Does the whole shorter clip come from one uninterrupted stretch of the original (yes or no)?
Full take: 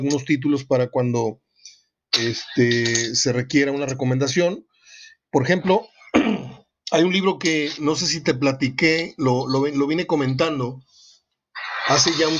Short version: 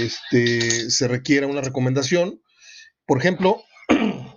yes